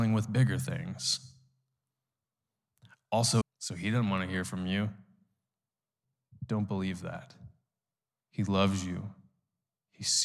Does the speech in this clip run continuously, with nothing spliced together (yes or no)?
no